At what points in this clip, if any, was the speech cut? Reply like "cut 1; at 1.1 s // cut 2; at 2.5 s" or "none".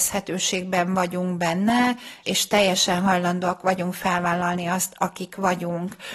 cut 1; at 2.2 s